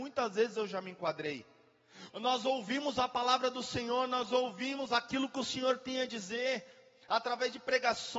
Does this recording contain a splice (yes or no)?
yes